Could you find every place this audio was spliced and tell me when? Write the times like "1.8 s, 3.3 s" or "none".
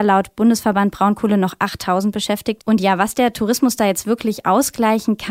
2.6 s